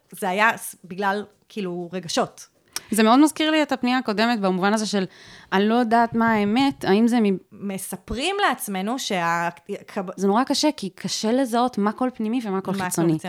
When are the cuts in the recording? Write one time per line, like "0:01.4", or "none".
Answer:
0:07.5
0:10.2